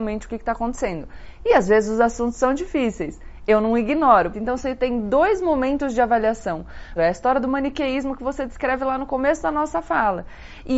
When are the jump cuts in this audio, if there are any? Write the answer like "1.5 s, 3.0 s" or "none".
4.3 s, 7.0 s